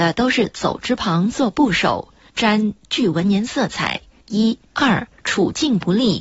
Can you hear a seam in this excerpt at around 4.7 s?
yes; 2 cuts; at 2.4 s, 4.7 s

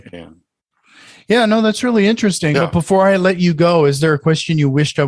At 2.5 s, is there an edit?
yes; 1 cut; at 2.5 s

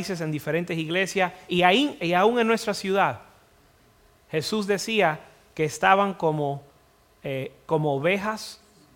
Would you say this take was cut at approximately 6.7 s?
no; 0 cuts

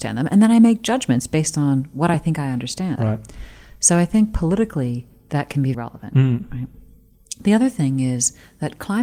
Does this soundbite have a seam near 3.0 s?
yes; 2 cuts; at 3.0 s, 5.7 s

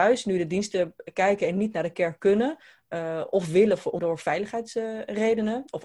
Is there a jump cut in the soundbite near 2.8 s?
no; 1 cut; at 4.0 s

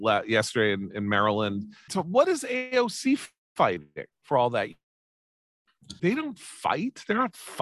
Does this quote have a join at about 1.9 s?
yes; 3 cuts; at 1.9 s, 4.1 s, 6.0 s

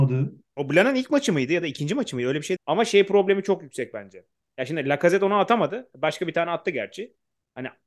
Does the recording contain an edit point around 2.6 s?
yes; 1 cut; at 2.6 s

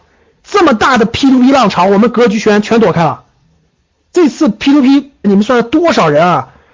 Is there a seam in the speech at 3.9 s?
yes; 2 cuts; at 3.9 s, 5.2 s

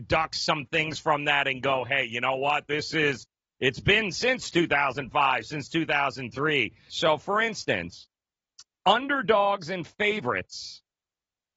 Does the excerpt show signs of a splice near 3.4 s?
no; 2 cuts; at 6.9 s, 8.8 s

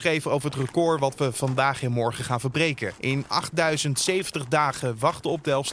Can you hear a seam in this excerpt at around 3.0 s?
yes; 1 cut; at 3.0 s

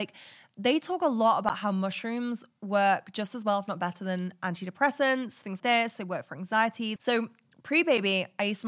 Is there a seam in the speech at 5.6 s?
yes; 2 cuts; at 5.6 s, 7.0 s

